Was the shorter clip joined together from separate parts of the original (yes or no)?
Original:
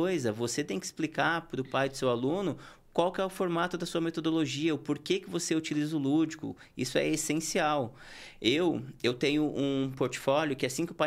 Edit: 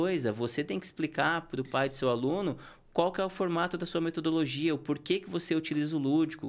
no